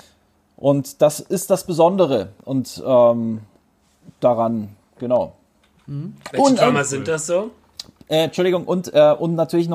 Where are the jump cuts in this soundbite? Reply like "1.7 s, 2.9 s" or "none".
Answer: none